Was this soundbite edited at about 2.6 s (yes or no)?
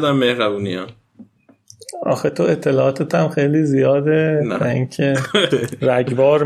no